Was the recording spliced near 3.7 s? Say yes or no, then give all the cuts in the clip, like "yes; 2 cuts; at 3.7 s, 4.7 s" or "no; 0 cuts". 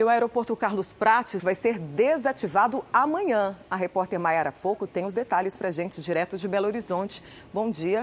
no; 1 cut; at 1.4 s